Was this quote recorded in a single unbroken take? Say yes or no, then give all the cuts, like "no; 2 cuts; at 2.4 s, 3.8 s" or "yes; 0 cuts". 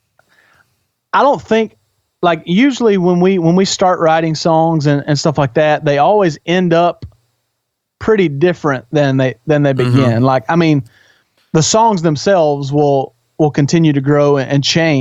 yes; 0 cuts